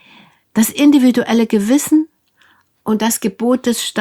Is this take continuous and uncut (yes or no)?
yes